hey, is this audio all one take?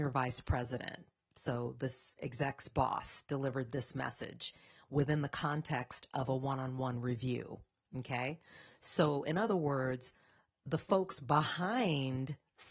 yes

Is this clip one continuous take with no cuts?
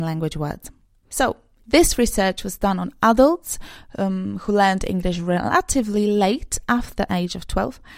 no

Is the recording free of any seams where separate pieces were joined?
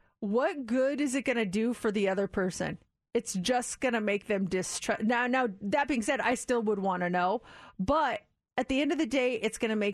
yes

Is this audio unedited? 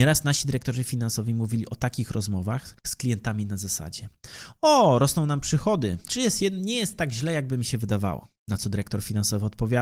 no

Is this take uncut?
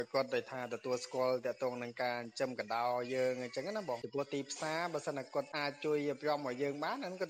yes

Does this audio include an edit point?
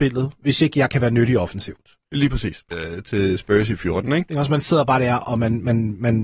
yes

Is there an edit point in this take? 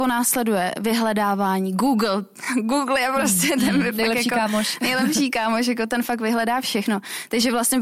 no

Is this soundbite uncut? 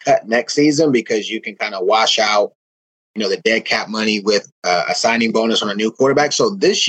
yes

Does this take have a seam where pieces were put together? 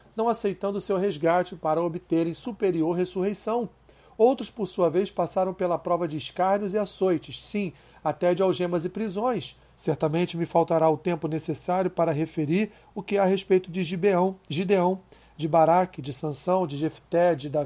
yes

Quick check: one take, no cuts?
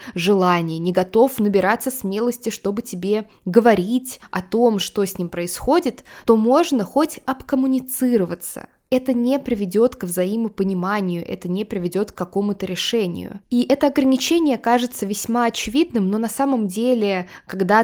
yes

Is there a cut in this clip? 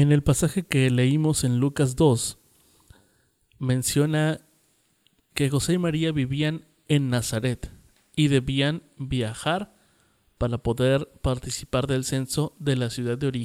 no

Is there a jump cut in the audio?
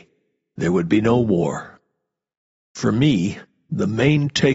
yes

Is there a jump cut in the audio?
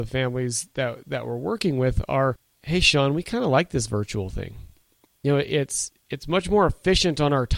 no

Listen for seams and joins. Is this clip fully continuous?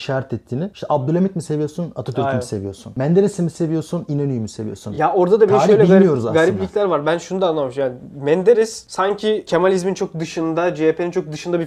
yes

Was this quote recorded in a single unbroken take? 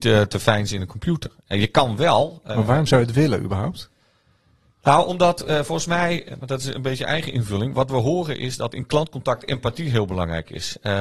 yes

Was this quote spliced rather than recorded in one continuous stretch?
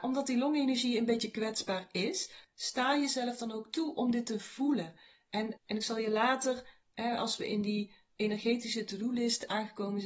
yes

